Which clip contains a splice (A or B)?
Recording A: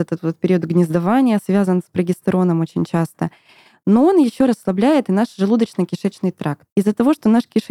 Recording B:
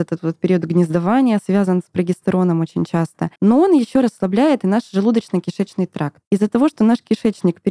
B